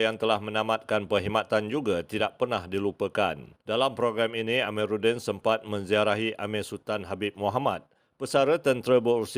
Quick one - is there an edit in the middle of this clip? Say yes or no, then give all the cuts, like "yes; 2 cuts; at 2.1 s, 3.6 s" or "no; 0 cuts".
yes; 1 cut; at 3.6 s